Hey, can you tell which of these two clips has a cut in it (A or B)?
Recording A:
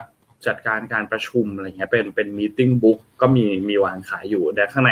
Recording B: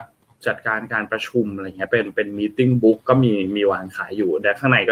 B